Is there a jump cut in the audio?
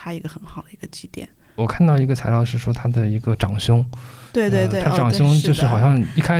no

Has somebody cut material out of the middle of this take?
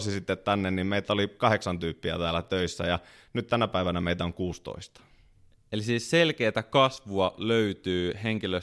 no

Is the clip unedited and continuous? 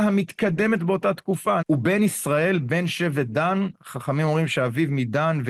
no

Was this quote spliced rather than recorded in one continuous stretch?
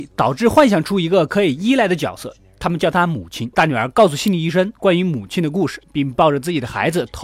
yes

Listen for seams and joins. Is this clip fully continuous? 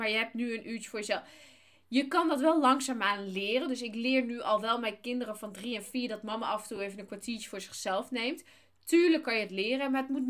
yes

